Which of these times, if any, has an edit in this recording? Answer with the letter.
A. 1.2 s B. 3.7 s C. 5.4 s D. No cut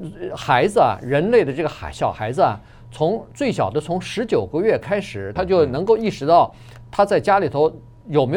C